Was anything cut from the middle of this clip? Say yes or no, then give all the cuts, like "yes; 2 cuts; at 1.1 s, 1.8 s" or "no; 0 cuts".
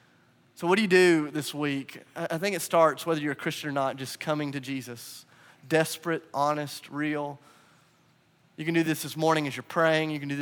no; 0 cuts